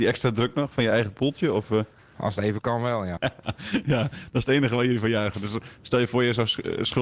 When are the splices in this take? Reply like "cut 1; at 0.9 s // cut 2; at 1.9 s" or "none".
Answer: cut 1; at 3.2 s